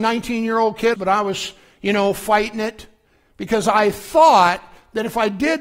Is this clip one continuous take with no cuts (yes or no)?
no